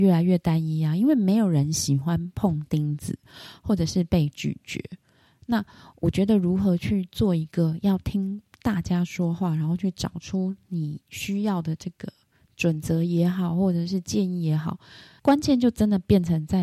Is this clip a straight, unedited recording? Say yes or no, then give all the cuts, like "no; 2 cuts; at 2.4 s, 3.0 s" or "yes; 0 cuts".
yes; 0 cuts